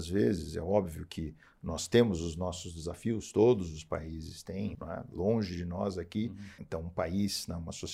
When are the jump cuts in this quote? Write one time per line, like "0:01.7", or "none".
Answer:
0:04.7
0:06.6

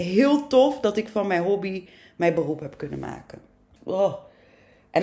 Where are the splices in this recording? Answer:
0:03.8

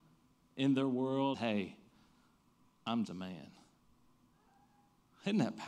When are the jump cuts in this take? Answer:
0:01.3
0:03.0

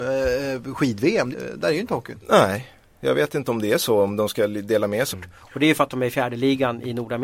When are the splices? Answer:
0:01.3
0:05.1

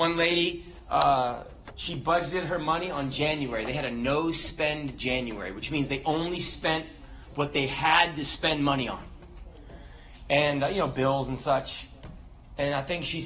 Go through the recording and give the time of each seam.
none

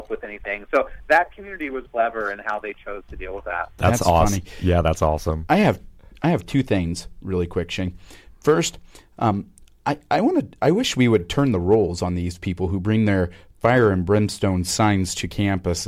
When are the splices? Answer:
0:01.9

